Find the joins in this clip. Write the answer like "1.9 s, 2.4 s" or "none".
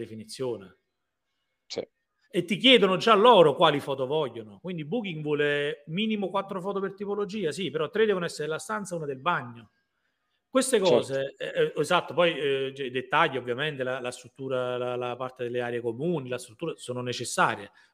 none